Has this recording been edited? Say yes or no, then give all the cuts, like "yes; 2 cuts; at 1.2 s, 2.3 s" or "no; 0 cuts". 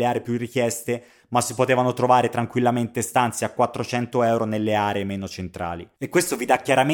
yes; 1 cut; at 5.9 s